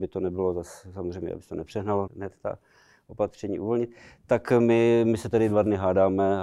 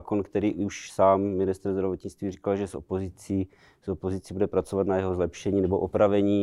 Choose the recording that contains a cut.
first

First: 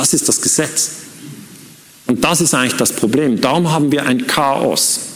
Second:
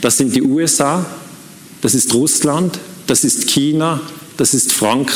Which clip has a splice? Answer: first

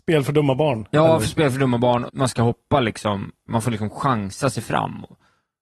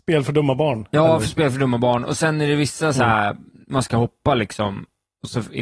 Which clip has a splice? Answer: first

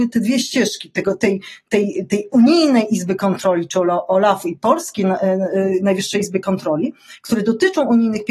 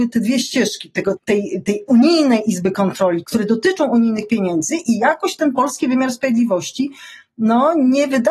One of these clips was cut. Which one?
second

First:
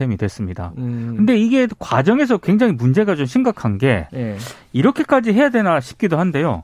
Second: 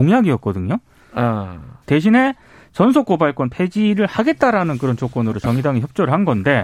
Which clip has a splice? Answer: second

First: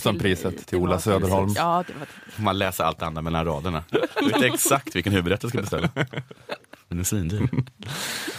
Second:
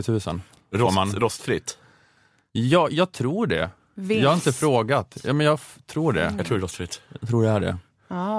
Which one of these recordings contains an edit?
first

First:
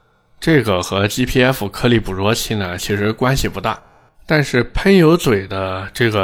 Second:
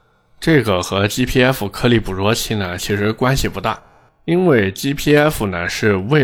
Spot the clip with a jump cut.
first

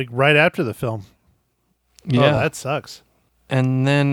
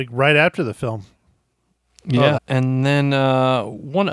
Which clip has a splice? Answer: second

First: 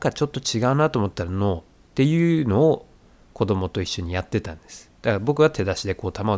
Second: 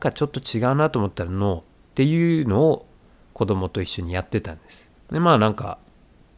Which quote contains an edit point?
second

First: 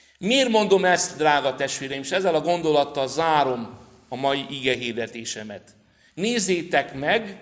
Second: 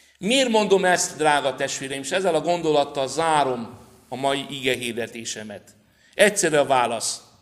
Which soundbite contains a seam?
first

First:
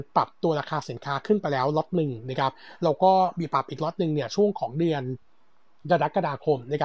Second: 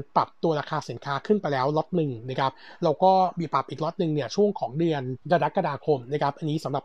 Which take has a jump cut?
second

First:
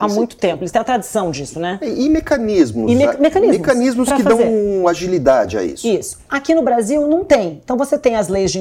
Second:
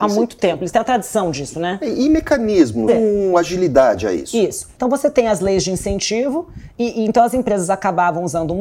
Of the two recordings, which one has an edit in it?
second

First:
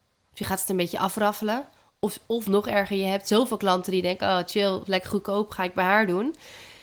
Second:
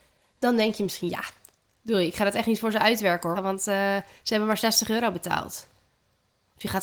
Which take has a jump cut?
second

